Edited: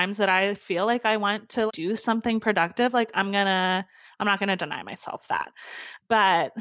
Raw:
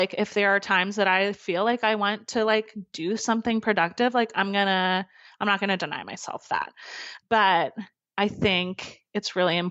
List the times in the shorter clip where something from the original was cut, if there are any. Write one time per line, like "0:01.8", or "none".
0:01.7